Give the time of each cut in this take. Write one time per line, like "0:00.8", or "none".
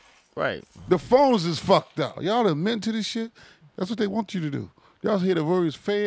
0:02.2
0:03.6